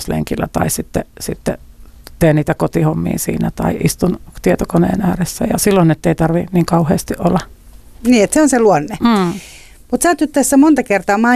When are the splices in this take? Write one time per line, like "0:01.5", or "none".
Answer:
none